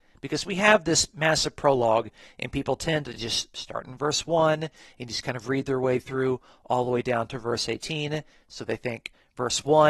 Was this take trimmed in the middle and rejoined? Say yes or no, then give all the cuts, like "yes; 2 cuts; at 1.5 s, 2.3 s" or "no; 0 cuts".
no; 0 cuts